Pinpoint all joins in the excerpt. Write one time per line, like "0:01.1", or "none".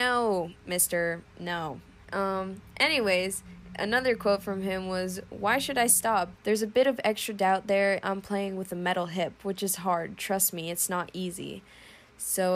0:02.0
0:06.3
0:08.0